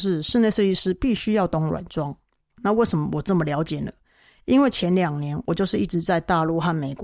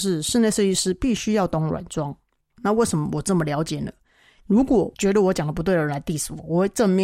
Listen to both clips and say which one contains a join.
second; 1 cut; at 4.4 s

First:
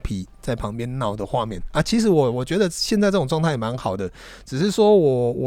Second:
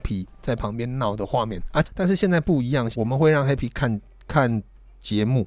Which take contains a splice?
second; 2 cuts; at 1.8 s, 2.9 s

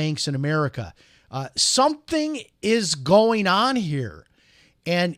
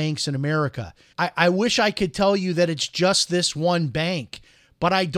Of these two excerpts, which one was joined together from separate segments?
second; 1 cut; at 1.1 s

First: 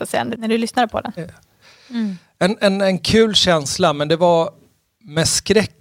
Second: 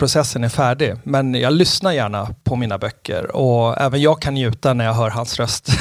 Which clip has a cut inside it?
first; 1 cut; at 1.2 s

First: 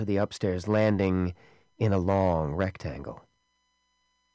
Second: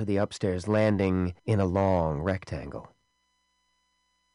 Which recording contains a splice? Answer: second; 1 cut; at 1.4 s

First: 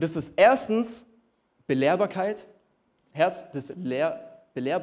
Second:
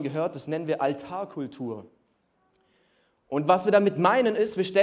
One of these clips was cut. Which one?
first; 1 cut; at 3.1 s

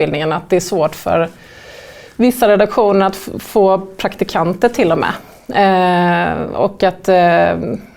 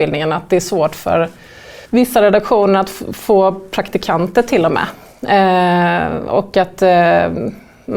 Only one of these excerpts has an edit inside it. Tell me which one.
second; 1 cut; at 1.9 s

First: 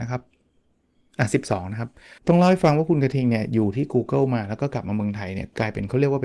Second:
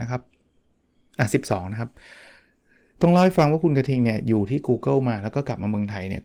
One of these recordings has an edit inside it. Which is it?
first; 1 cut; at 2.2 s

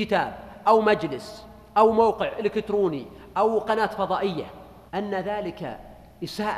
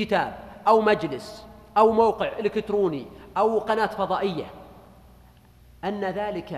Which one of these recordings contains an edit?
first; 1 cut; at 4.9 s

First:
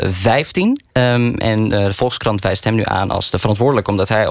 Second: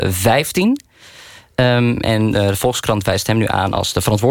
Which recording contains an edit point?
first; 1 cut; at 0.9 s

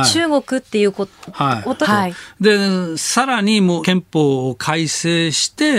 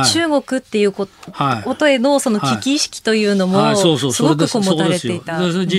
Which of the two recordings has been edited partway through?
first; 2 cuts; at 1.8 s, 3.8 s

